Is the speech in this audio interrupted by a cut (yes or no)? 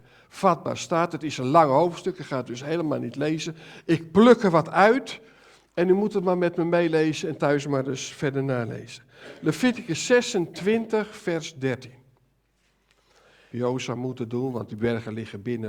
yes